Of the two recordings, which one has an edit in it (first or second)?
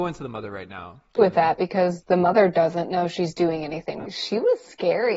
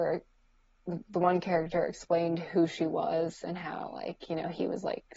first